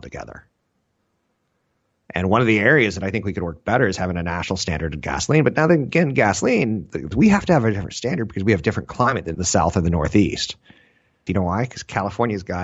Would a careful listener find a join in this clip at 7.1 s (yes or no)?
yes